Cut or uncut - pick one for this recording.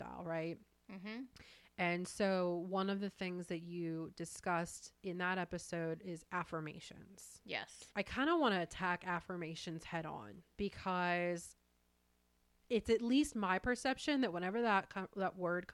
cut